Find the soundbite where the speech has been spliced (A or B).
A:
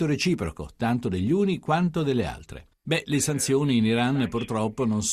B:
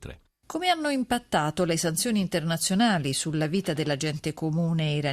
A